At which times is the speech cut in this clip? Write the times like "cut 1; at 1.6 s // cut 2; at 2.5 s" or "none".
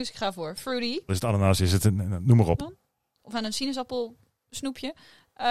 cut 1; at 1.1 s // cut 2; at 2.6 s